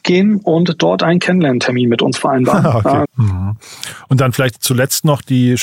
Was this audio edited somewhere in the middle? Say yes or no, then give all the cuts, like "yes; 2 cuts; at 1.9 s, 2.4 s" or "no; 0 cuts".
yes; 1 cut; at 3.0 s